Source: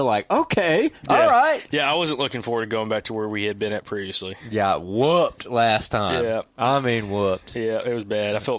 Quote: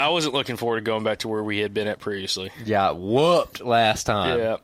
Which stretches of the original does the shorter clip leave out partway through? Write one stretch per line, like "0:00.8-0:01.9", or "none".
none